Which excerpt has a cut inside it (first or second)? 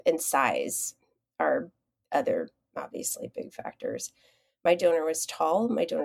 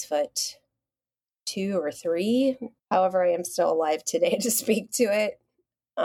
second